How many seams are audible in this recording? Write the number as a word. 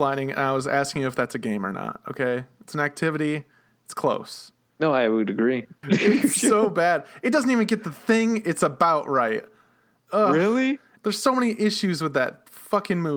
three